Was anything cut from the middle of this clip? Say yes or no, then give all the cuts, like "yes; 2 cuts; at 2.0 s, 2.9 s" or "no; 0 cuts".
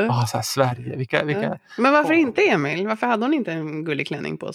no; 0 cuts